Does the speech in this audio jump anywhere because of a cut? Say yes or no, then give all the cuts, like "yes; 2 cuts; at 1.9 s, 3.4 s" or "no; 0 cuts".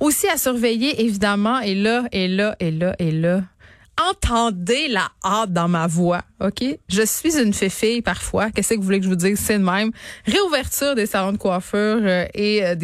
no; 0 cuts